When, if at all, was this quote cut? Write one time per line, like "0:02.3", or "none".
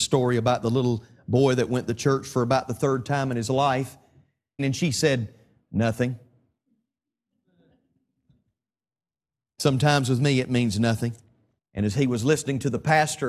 0:04.6
0:11.6